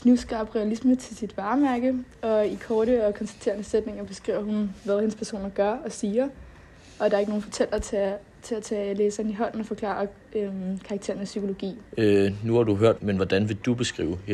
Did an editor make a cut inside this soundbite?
yes; 2 cuts; at 11.9 s, 13.0 s

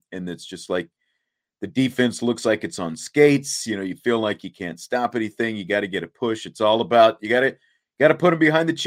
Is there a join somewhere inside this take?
no; 0 cuts

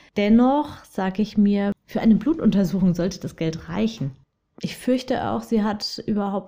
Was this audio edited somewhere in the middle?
yes; 1 cut; at 4.6 s

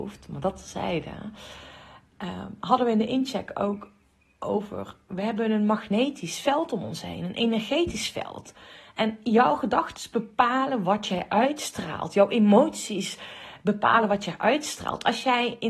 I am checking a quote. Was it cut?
no; 0 cuts

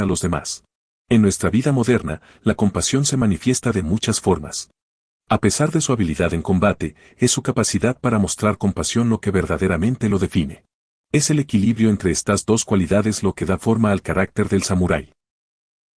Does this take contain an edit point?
yes; 3 cuts; at 1.0 s, 5.2 s, 11.0 s

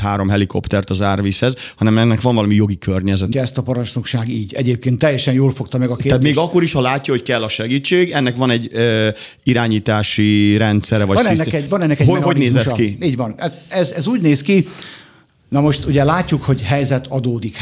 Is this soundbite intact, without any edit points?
no; 1 cut; at 3.3 s

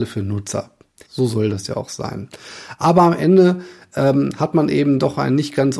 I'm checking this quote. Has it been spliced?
yes; 1 cut; at 1.1 s

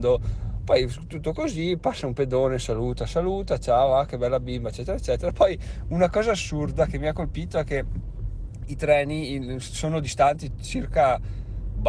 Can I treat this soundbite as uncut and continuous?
yes; 0 cuts

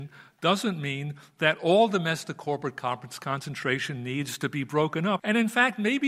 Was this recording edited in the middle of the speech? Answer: yes; 1 cut; at 5.2 s

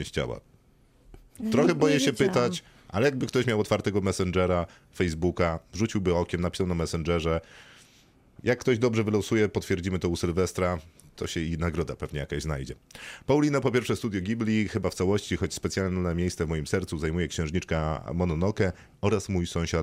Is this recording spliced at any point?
no; 0 cuts

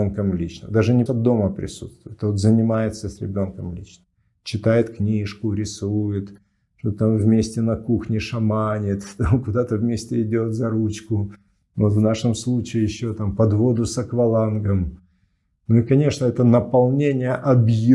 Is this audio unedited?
no; 1 cut; at 1.1 s

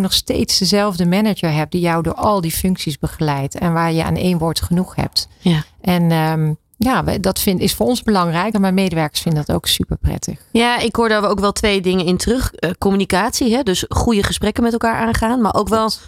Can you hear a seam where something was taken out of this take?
yes; 1 cut; at 8.5 s

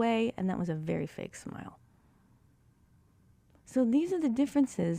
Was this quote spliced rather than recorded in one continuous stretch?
no; 0 cuts

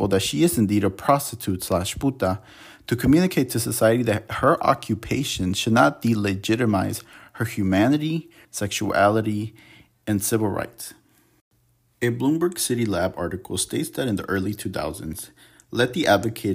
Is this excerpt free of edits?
no; 1 cut; at 8.4 s

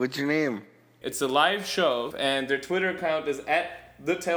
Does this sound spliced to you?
yes; 2 cuts; at 1.0 s, 2.1 s

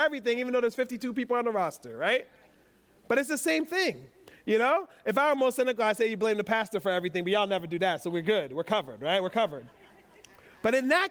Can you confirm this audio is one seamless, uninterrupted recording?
yes; 0 cuts

